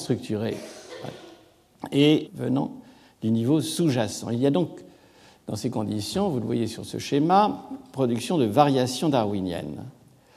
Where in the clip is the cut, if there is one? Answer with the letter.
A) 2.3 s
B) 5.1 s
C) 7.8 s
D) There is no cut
A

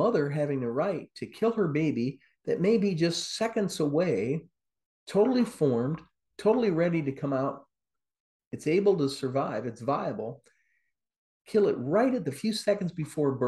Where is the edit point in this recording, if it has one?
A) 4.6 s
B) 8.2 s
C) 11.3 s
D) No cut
D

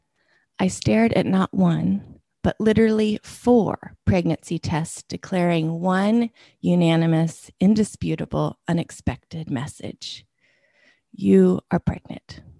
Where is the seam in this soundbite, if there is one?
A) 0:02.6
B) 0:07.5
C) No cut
C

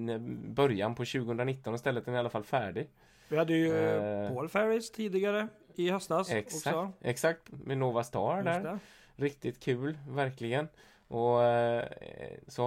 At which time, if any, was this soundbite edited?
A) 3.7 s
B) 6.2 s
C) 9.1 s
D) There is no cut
D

